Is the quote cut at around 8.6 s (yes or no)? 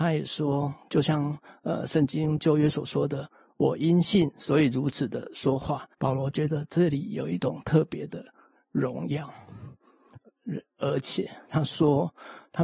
no